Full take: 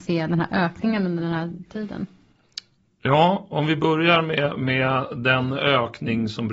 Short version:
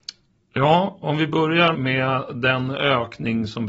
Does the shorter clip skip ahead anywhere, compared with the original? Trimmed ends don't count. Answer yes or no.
yes